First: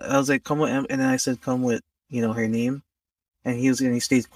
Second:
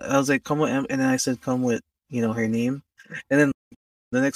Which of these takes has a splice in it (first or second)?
second